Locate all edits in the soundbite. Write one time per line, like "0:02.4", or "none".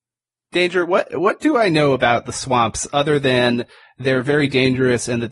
0:02.9